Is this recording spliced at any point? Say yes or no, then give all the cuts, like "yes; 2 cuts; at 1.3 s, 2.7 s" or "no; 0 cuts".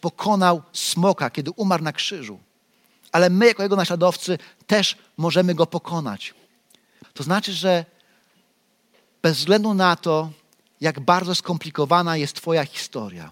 yes; 1 cut; at 7.0 s